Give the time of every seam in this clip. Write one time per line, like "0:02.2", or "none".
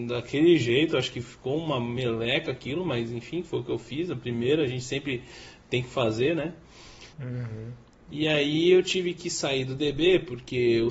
0:07.1